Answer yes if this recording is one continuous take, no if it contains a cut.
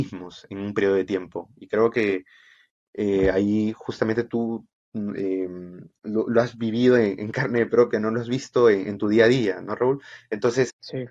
yes